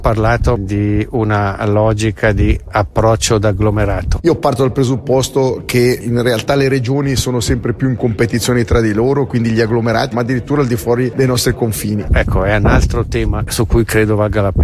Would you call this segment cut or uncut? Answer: cut